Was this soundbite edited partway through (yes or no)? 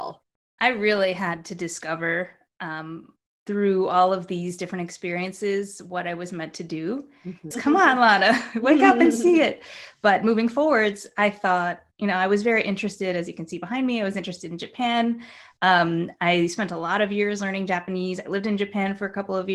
yes